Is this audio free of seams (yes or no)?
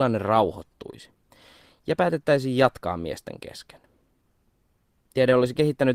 yes